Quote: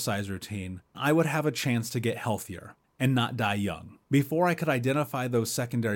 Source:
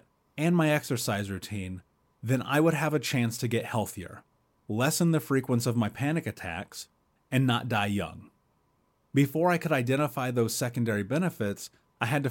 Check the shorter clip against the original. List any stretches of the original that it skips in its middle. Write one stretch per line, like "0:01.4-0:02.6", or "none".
0:02.0-0:02.4
0:04.3-0:07.1
0:08.3-0:09.1